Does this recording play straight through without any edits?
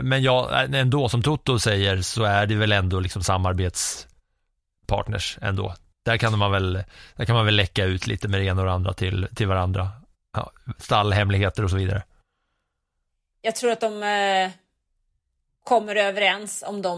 yes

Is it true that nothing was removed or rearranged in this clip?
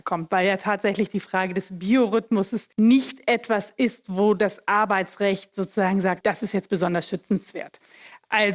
no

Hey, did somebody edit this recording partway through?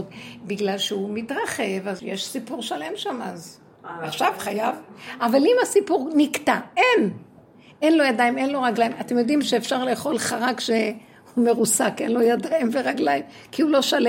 yes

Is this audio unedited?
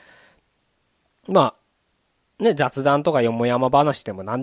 yes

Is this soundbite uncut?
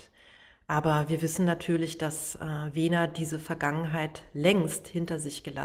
yes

